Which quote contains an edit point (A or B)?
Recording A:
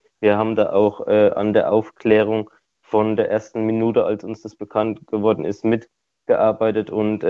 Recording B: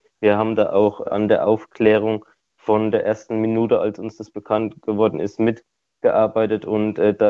B